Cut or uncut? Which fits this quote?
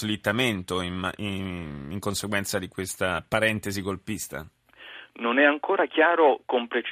uncut